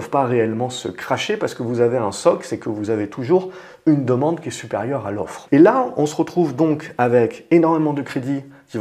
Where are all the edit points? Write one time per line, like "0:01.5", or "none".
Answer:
0:05.5